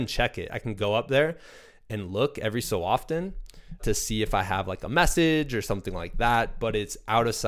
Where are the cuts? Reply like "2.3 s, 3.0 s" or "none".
3.8 s